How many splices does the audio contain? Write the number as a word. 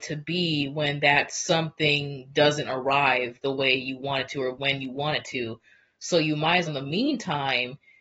one